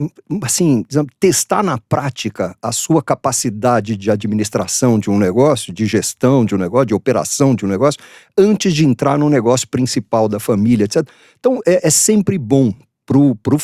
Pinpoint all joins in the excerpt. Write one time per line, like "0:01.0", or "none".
none